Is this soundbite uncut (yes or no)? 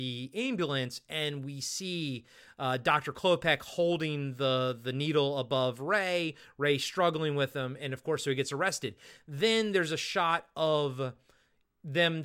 yes